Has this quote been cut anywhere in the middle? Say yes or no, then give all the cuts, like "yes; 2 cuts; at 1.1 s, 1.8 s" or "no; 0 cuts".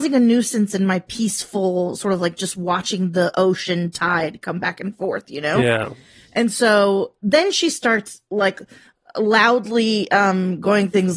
no; 0 cuts